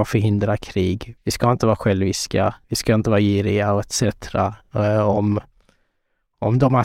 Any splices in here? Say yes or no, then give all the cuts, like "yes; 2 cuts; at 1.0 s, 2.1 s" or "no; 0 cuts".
yes; 2 cuts; at 1.2 s, 2.6 s